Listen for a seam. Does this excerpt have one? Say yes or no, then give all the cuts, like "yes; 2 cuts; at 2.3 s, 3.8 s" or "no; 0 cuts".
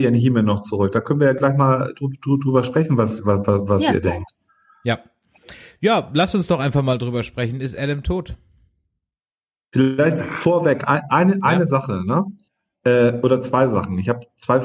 no; 0 cuts